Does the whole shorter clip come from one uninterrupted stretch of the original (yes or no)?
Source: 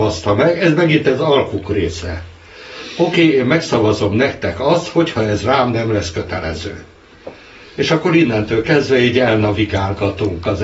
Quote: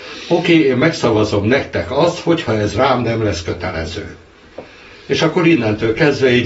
yes